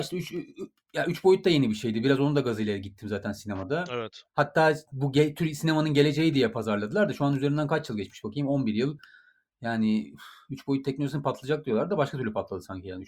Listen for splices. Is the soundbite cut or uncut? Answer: uncut